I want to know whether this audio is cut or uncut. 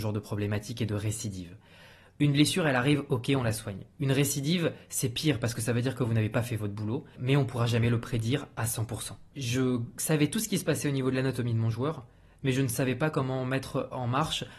cut